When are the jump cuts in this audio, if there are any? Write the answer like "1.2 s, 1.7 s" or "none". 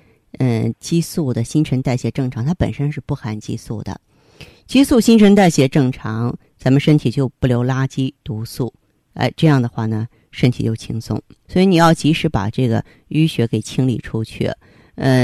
11.5 s

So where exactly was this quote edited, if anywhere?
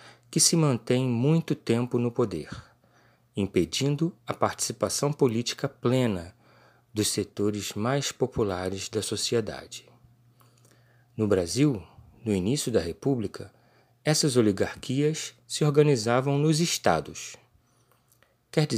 none

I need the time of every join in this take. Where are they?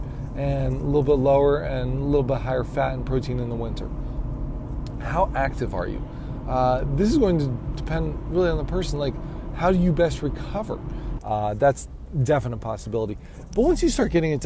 11.2 s

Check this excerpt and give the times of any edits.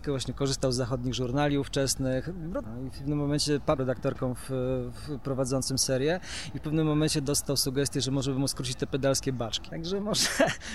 2.6 s, 3.8 s

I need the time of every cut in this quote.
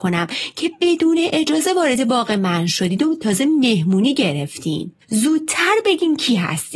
5.0 s

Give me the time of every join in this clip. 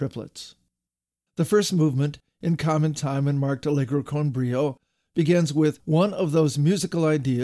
1.3 s

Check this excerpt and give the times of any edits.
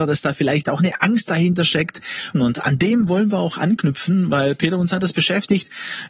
2.3 s

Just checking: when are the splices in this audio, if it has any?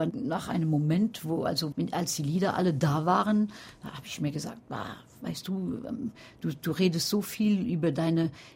1.7 s

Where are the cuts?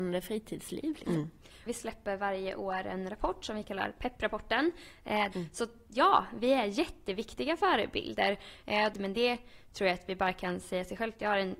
1.7 s, 5.3 s, 8.9 s

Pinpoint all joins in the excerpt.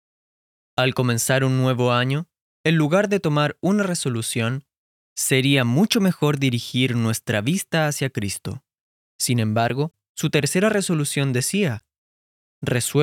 9.0 s

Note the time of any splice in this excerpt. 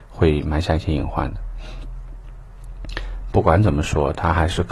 3.3 s

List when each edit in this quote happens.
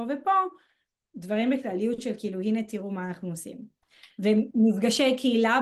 none

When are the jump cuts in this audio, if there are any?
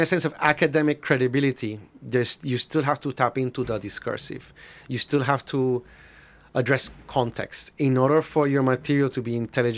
none

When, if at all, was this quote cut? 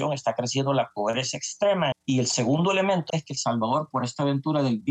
1.9 s, 3.1 s

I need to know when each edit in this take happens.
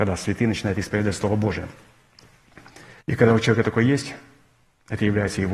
3.0 s

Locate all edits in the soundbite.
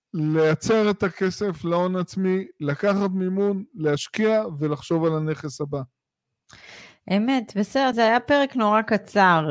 7.9 s

